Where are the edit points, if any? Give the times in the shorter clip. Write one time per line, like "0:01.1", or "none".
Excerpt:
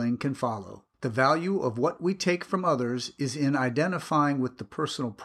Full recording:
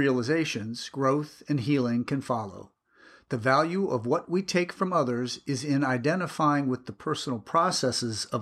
0:00.9

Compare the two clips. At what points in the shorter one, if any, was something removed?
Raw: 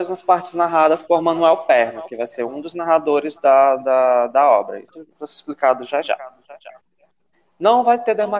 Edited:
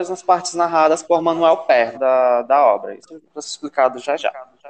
0:01.9

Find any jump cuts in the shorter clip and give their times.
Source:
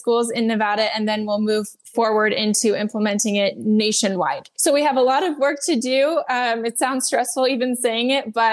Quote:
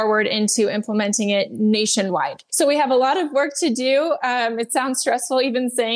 none

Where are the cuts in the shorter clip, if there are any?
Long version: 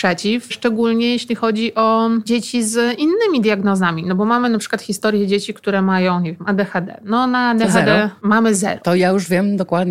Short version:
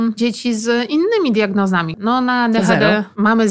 0:01.9

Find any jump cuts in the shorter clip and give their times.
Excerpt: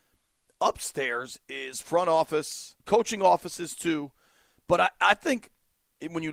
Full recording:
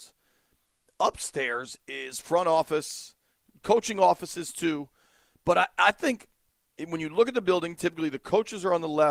0:02.8

